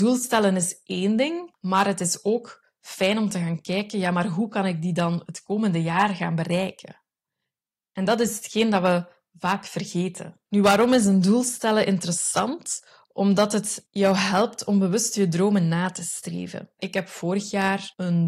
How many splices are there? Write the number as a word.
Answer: two